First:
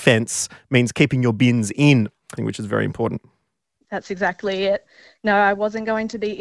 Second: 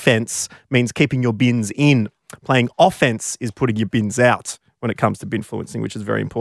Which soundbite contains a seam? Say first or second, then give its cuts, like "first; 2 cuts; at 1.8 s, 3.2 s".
first; 1 cut; at 2.4 s